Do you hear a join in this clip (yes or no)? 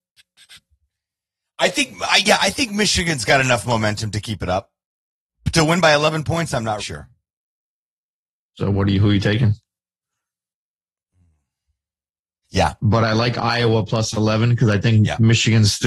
yes